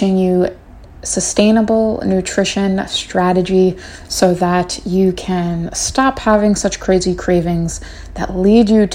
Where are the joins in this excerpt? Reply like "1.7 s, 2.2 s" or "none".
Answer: none